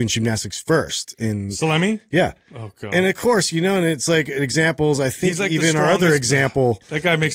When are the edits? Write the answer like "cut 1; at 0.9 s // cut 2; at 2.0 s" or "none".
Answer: none